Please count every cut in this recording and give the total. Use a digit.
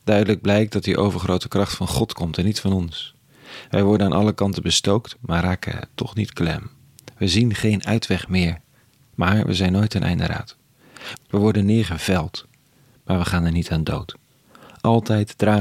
1